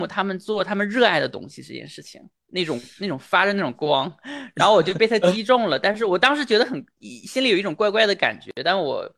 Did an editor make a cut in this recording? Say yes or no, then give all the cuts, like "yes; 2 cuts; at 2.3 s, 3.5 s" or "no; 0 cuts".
yes; 1 cut; at 2.4 s